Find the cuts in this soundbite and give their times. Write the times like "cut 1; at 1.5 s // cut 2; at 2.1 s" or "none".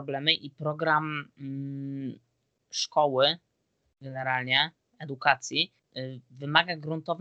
none